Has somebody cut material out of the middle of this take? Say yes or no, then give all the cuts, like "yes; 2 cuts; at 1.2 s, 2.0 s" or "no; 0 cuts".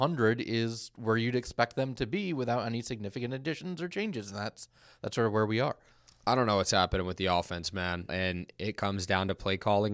yes; 1 cut; at 8.1 s